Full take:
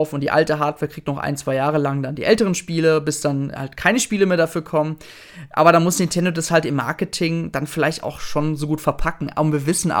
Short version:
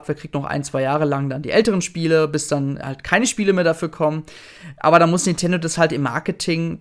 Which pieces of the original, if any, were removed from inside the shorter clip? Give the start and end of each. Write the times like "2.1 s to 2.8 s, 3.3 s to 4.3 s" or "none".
none